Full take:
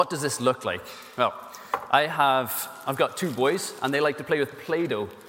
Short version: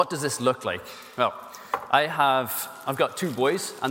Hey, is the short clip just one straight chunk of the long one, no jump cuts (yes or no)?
yes